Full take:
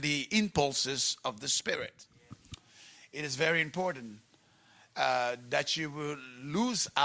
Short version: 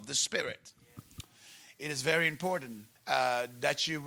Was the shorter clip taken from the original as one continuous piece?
no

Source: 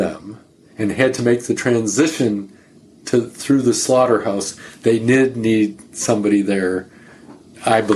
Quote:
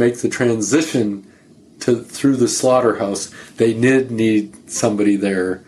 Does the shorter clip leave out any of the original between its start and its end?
no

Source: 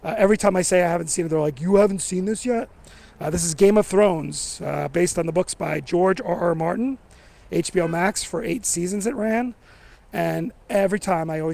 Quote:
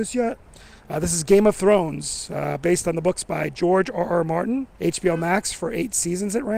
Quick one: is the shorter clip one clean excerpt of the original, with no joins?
no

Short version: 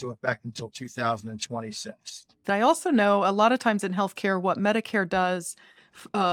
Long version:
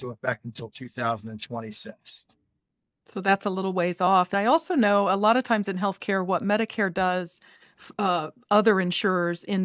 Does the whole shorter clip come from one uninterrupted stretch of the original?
no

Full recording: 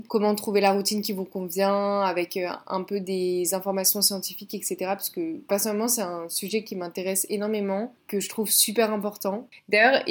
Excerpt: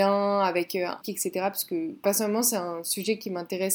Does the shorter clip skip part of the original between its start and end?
yes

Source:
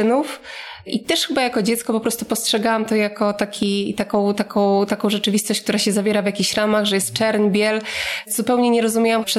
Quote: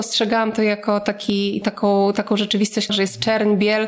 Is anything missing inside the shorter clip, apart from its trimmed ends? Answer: yes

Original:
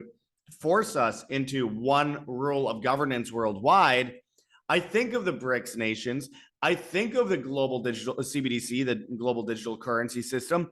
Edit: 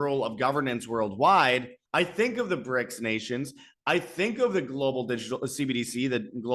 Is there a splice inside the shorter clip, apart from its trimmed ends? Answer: yes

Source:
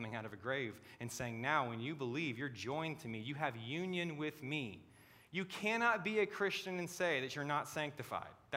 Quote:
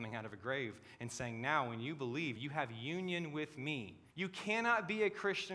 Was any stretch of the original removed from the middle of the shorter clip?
yes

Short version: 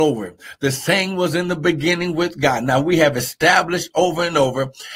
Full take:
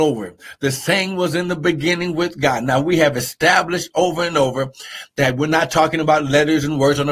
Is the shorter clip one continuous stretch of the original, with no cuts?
yes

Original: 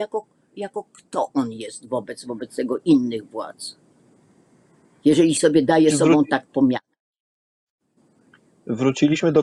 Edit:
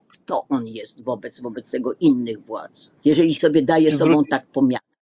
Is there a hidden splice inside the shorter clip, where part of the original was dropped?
yes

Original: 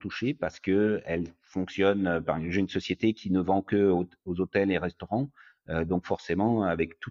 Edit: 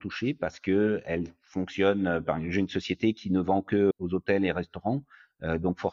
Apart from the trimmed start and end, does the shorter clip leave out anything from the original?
yes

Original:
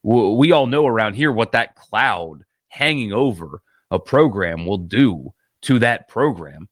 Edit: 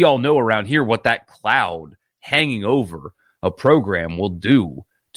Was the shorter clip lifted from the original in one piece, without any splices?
yes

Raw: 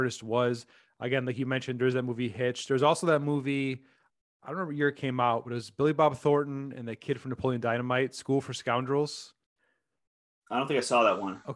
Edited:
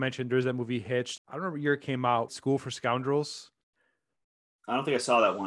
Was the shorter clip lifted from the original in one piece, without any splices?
no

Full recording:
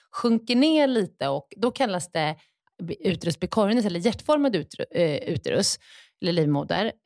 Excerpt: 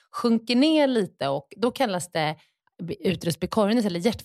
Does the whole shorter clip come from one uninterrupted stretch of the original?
yes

